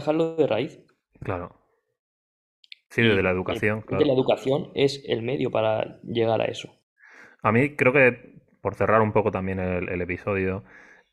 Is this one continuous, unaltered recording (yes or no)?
yes